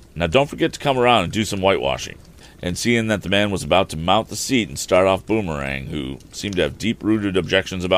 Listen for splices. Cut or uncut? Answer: uncut